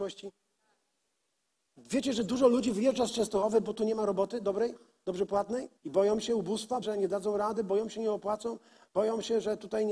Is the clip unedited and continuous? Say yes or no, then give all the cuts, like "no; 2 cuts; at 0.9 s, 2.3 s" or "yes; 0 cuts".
no; 2 cuts; at 5.8 s, 6.8 s